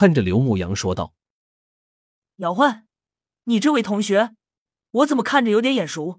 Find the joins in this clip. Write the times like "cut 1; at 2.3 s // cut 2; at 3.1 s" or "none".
none